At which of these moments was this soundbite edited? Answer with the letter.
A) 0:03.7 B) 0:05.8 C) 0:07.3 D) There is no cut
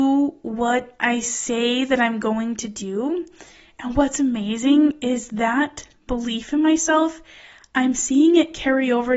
D